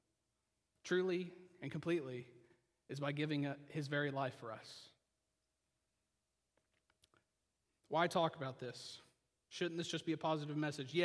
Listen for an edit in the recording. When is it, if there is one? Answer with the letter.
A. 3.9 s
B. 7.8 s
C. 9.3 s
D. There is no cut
D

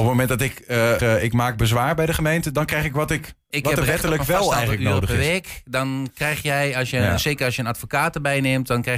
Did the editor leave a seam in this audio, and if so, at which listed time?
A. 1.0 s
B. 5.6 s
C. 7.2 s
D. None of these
A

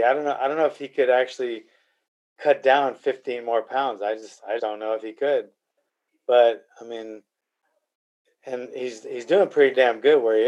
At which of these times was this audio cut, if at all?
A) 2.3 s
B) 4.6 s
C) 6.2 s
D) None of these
B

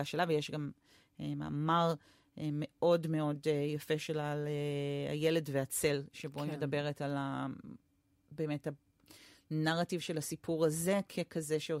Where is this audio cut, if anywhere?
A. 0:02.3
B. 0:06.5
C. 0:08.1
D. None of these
D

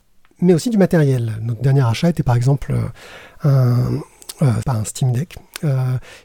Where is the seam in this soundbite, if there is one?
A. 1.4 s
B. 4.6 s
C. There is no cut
B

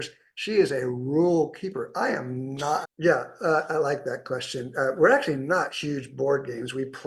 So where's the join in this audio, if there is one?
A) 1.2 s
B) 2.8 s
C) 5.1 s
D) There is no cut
B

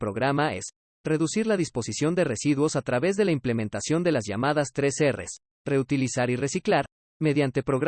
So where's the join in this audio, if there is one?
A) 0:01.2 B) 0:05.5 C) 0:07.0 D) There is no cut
B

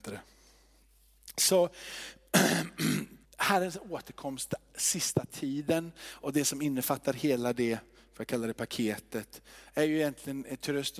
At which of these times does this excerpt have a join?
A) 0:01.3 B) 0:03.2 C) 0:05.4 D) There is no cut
B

